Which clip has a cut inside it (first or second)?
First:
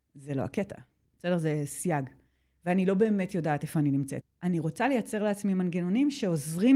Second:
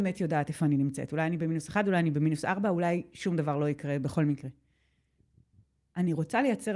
first